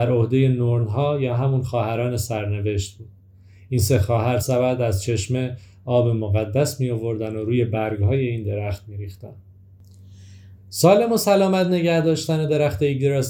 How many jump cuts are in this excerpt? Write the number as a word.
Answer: two